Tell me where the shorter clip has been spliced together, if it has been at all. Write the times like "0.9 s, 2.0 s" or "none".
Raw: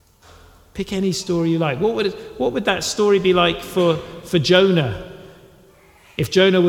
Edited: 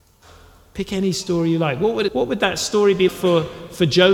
2.1 s, 3.1 s